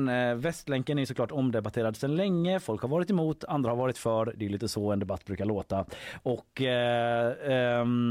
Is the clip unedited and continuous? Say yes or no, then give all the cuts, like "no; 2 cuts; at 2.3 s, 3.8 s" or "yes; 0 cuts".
yes; 0 cuts